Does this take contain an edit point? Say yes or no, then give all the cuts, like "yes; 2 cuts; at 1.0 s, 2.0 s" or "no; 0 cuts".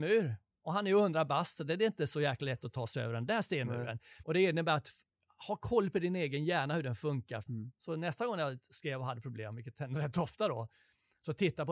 yes; 2 cuts; at 4.2 s, 7.5 s